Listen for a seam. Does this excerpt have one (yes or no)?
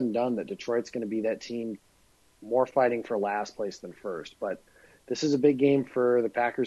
no